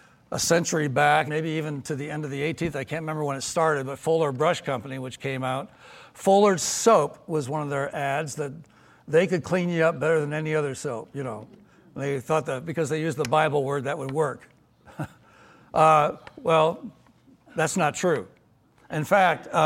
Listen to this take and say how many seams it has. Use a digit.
1